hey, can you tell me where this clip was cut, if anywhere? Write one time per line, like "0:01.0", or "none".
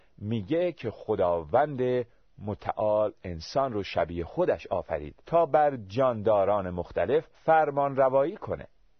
0:05.2
0:07.3